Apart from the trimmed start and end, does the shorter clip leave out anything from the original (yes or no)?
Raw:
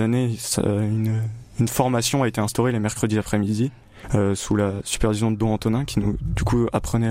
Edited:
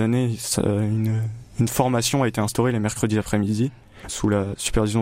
yes